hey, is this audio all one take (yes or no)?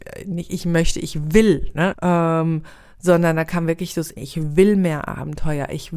no